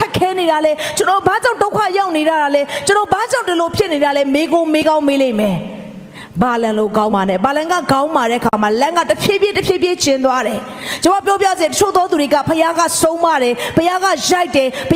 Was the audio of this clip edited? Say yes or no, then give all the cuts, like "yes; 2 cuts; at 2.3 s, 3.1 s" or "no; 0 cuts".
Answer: yes; 1 cut; at 7.1 s